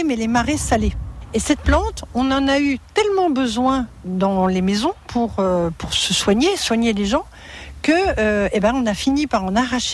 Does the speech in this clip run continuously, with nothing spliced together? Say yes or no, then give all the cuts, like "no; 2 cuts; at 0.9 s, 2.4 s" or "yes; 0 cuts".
yes; 0 cuts